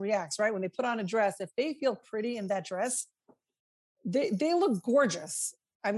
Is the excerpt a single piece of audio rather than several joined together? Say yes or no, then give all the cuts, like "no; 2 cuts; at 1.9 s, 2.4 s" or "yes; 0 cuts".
yes; 0 cuts